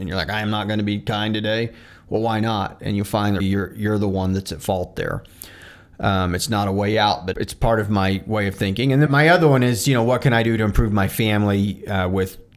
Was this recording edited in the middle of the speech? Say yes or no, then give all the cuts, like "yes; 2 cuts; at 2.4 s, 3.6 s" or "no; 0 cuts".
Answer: yes; 3 cuts; at 3.4 s, 7.3 s, 9.1 s